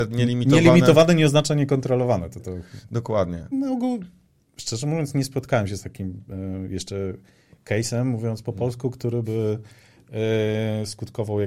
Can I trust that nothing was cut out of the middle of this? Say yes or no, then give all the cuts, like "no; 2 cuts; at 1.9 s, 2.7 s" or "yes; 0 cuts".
no; 1 cut; at 3.5 s